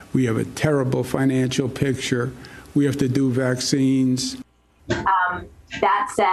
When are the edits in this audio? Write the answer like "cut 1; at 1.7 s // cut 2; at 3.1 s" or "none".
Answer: cut 1; at 4.8 s